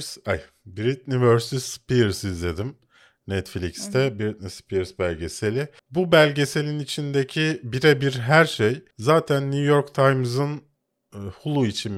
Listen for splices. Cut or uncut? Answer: cut